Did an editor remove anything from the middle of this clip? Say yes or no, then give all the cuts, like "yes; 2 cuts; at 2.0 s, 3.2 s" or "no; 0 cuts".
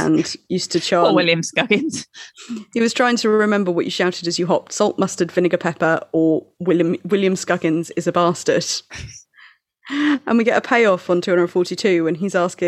no; 0 cuts